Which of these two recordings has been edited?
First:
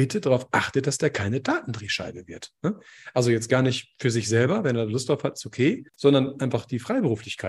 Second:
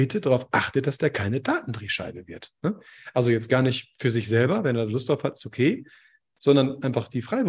first; 1 cut; at 5.9 s

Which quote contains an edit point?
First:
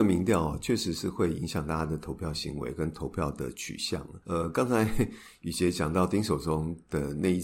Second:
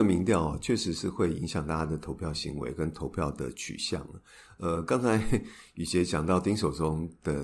first; 1 cut; at 4.2 s

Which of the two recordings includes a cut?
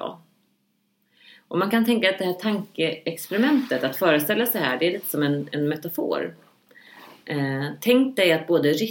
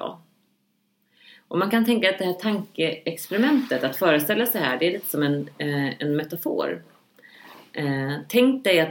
first; 1 cut; at 5.5 s

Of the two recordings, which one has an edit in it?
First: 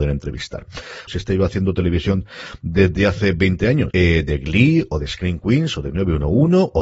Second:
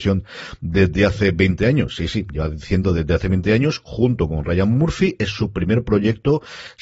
first; 2 cuts; at 1.1 s, 3.9 s

